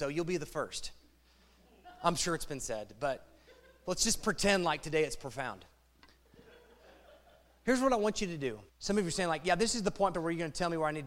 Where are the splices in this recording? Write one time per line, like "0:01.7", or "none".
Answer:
0:08.7
0:10.1

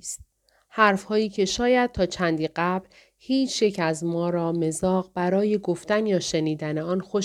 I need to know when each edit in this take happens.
none

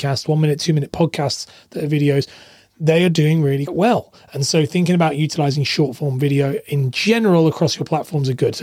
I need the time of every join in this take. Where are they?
0:03.7

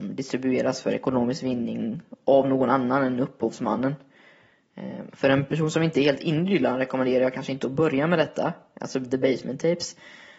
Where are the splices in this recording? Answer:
0:05.1

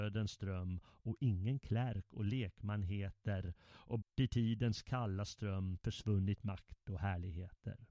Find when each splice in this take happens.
0:04.0

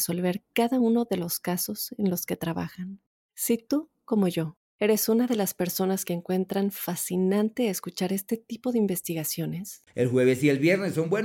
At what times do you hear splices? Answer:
0:09.9

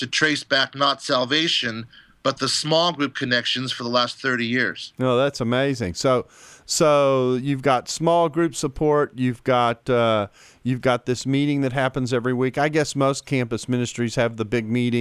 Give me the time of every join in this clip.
none

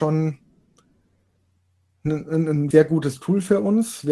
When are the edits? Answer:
0:02.7

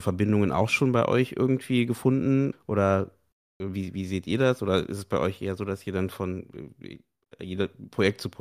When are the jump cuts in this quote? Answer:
none

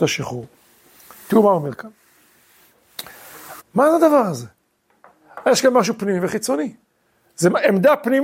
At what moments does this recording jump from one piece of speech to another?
0:03.6

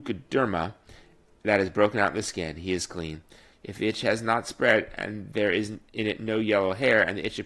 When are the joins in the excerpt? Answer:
0:03.5

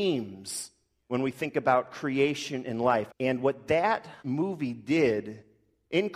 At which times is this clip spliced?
0:03.1
0:04.2

